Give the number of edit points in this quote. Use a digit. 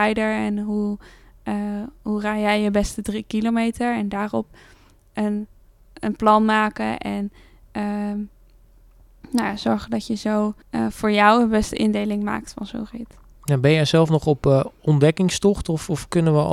1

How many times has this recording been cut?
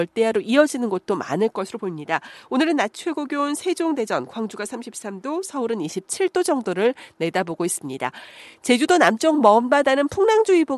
0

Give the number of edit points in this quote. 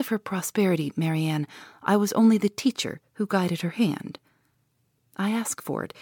0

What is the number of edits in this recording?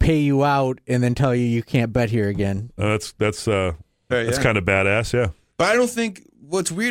2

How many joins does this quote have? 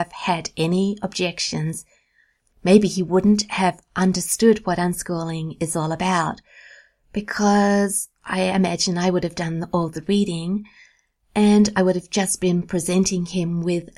0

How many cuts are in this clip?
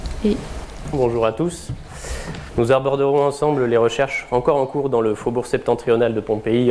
2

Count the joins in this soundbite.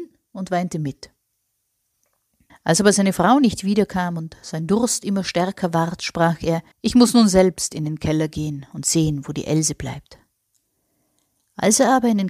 2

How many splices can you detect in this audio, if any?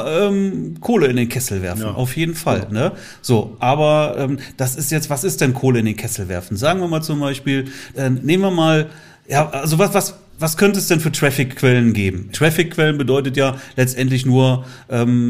2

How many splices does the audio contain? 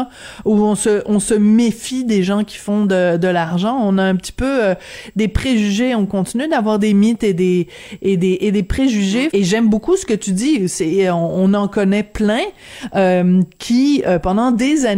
1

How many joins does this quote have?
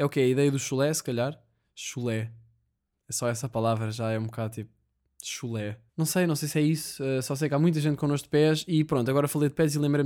1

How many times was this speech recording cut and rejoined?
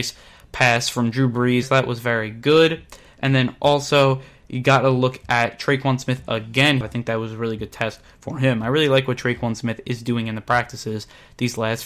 2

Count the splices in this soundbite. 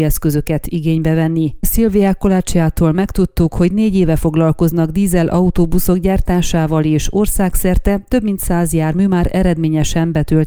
1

